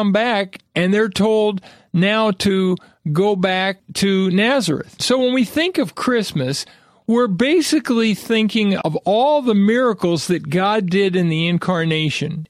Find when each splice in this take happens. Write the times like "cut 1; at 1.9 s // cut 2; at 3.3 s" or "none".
none